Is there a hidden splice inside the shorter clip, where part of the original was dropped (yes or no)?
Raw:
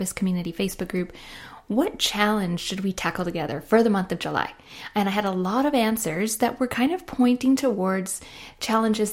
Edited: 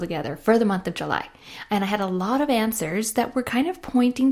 no